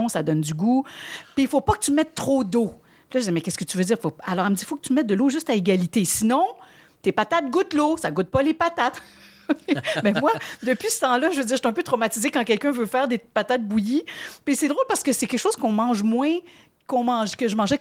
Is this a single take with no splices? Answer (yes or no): yes